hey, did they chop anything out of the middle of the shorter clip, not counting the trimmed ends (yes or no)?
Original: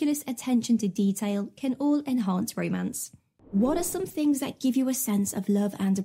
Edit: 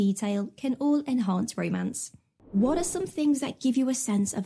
no